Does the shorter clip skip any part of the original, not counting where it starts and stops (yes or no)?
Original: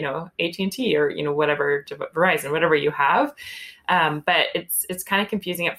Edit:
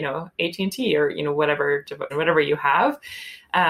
yes